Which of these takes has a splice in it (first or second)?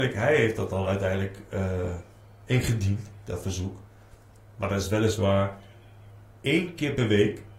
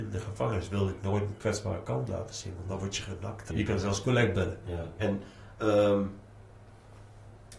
second